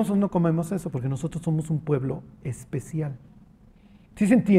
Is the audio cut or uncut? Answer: uncut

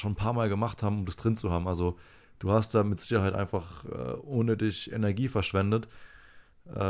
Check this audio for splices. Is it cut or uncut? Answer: uncut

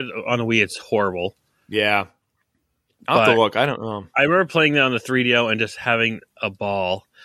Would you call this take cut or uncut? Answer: uncut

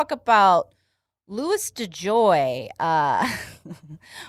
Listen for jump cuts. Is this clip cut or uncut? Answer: uncut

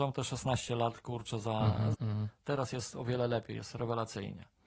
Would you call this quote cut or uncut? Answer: cut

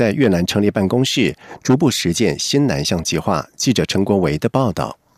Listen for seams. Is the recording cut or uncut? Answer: uncut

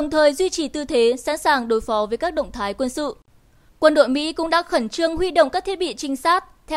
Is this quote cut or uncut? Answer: cut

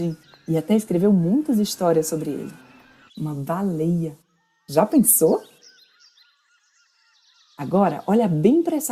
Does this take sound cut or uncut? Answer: cut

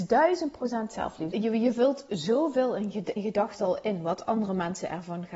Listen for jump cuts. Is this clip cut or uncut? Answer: cut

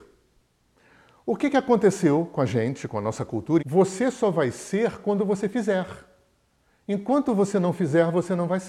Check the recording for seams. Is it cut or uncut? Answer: cut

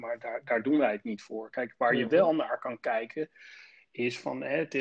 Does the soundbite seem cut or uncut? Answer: uncut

